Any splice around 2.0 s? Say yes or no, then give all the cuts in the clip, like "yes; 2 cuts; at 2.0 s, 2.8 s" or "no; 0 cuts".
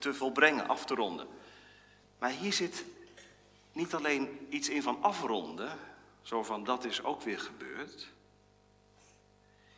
yes; 1 cut; at 2.0 s